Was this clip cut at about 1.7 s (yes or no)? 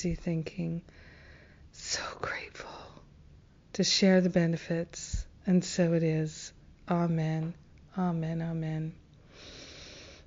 no